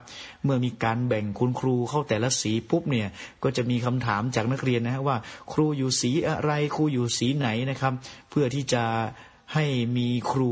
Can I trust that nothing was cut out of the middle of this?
yes; 0 cuts

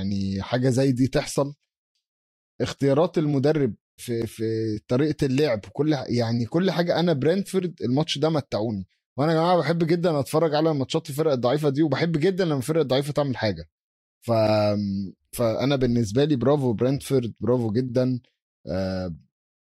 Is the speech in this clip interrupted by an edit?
yes; 1 cut; at 4.0 s

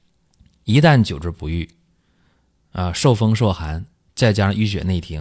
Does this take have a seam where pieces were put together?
no; 0 cuts

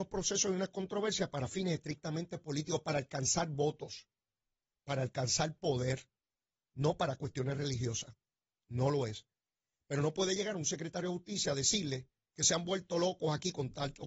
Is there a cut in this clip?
no; 0 cuts

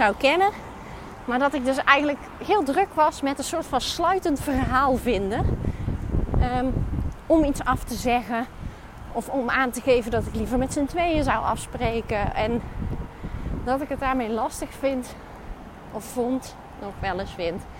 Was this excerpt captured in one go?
yes; 0 cuts

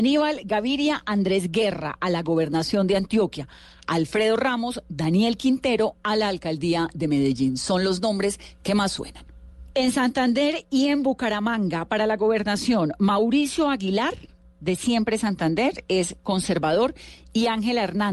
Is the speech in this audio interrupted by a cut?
no; 0 cuts

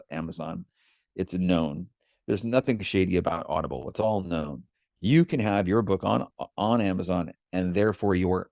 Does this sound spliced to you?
no; 0 cuts

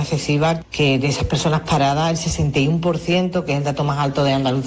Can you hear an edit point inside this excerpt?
no; 0 cuts

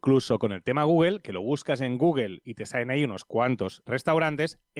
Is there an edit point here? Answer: yes; 1 cut; at 3.9 s

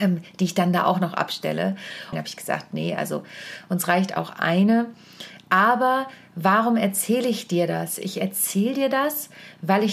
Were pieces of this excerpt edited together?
yes; 1 cut; at 2.1 s

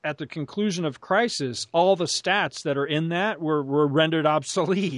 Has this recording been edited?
no; 0 cuts

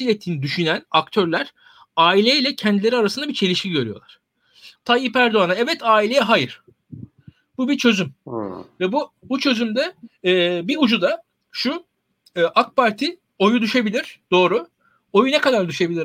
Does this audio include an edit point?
yes; 1 cut; at 4.8 s

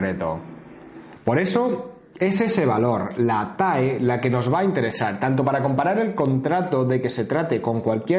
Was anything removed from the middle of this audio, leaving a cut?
yes; 1 cut; at 1.2 s

